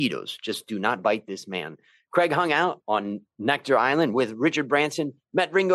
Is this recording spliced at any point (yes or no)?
no